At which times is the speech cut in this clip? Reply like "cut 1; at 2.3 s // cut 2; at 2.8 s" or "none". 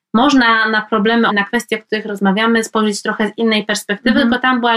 cut 1; at 1.3 s